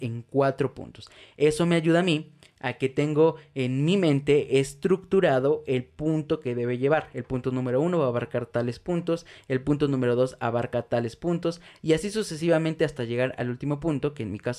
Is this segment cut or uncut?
uncut